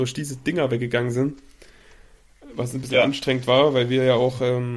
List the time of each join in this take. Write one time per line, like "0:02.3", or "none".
none